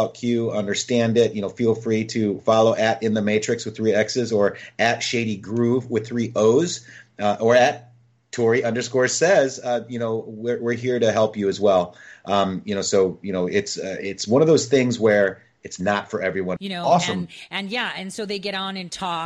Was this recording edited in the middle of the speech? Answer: yes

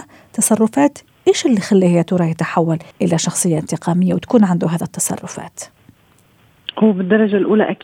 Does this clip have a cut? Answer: yes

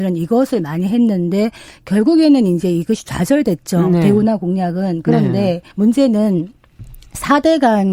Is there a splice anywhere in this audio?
yes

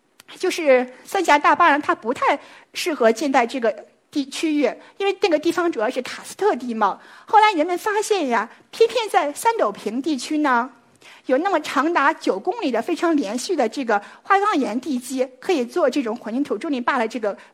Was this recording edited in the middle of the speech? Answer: no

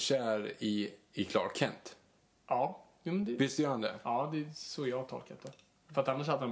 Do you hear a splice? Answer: no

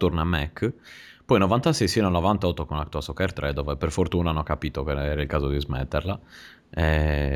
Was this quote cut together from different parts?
no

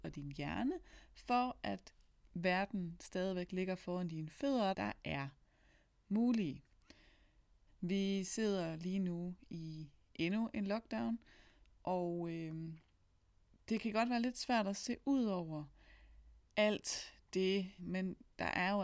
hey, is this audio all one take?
no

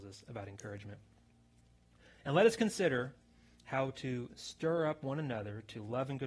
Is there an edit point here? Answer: no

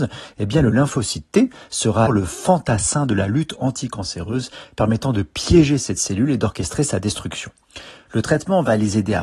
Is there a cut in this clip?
yes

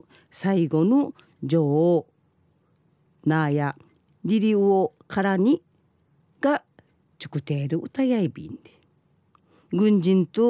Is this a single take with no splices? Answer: yes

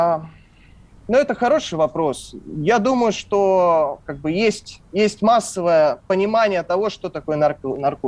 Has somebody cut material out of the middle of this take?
no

